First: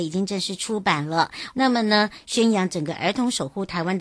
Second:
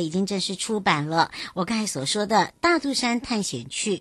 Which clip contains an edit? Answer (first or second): first